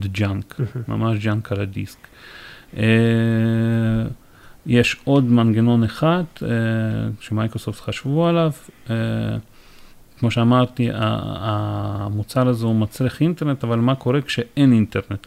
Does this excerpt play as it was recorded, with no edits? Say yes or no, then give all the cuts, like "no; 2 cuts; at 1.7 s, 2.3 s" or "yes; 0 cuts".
yes; 0 cuts